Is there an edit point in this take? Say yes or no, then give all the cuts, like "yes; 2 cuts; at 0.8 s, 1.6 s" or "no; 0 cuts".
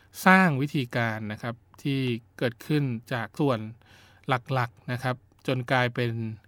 yes; 1 cut; at 3.4 s